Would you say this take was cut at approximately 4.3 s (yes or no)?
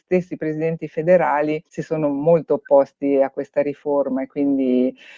no